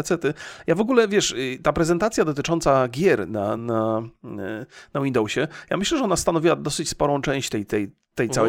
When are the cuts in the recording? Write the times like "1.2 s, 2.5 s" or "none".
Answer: 3.6 s